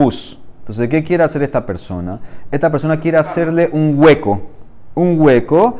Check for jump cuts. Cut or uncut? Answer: uncut